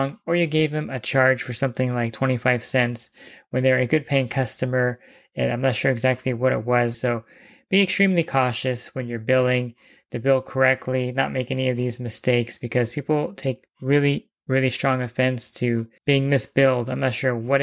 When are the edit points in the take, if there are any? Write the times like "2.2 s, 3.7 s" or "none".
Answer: 6.9 s, 16.0 s